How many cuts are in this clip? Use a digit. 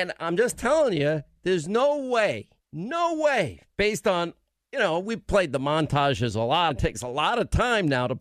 1